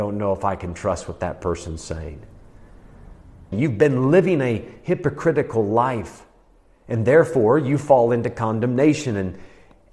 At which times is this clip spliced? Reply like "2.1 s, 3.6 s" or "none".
3.5 s